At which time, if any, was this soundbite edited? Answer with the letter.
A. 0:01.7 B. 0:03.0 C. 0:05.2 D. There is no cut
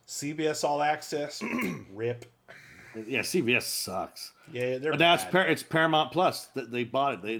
D